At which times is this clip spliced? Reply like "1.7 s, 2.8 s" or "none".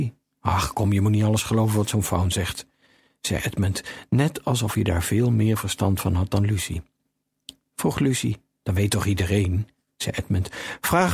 7.6 s